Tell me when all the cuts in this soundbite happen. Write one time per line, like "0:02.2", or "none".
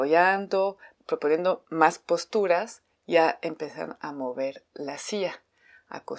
none